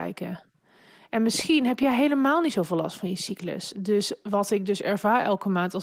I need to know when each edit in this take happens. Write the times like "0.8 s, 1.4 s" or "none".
3.7 s